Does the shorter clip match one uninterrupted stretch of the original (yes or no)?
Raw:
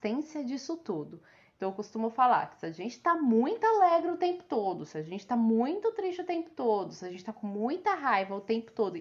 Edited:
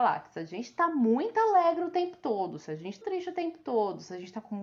no